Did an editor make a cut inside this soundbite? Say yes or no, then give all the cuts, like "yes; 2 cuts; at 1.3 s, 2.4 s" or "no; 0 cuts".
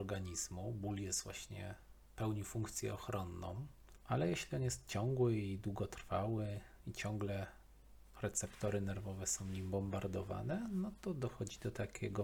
no; 0 cuts